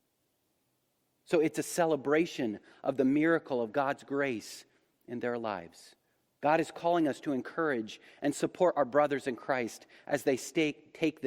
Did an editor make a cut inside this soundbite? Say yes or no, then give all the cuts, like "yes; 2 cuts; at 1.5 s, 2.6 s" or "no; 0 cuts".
yes; 2 cuts; at 1.2 s, 6.4 s